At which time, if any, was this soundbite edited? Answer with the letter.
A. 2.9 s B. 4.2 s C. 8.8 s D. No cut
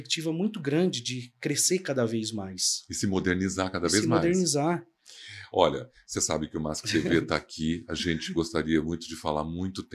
D